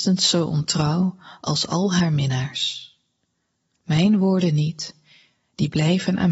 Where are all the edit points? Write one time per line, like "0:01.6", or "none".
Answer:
none